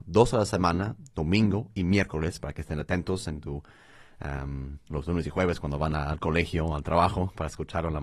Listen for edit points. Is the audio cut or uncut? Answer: uncut